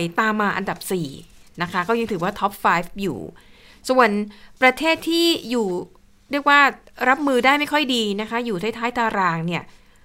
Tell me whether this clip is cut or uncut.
uncut